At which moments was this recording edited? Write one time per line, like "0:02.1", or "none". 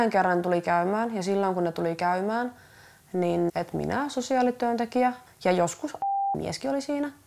0:03.5
0:05.3